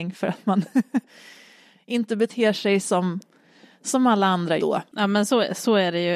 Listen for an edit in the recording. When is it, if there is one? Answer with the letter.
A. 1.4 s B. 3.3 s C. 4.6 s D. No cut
C